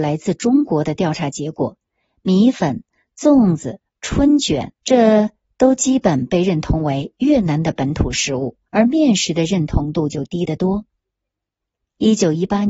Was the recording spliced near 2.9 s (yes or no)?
no